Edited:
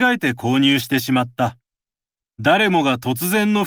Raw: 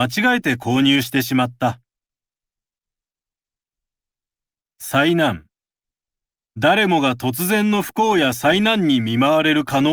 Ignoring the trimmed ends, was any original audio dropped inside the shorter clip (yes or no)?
yes